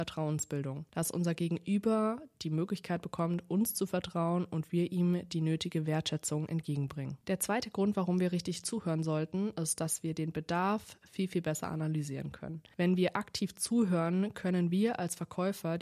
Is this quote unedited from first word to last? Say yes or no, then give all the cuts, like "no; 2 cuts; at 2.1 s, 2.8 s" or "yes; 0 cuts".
yes; 0 cuts